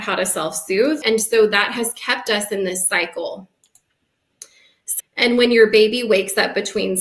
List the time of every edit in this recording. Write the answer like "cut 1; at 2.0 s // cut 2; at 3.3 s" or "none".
cut 1; at 1.0 s // cut 2; at 5.0 s